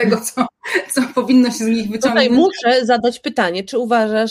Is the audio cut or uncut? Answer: uncut